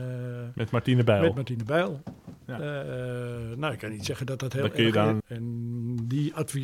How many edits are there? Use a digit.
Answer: 1